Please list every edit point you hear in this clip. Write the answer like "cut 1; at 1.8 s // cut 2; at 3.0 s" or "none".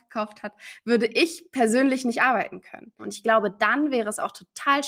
cut 1; at 3.0 s